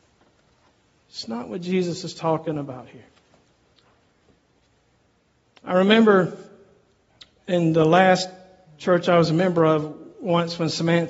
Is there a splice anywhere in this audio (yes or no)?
no